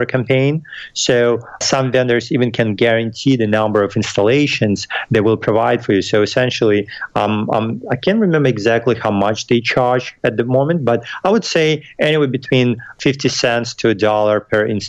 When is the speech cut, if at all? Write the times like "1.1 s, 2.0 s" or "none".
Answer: none